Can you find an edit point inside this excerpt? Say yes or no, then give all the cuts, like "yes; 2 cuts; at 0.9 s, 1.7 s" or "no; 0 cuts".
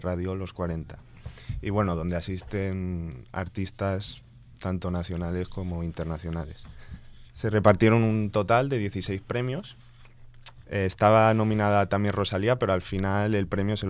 yes; 1 cut; at 10.6 s